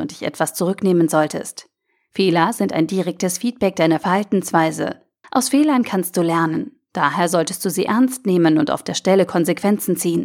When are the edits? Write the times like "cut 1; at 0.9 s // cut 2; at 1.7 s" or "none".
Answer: cut 1; at 5.2 s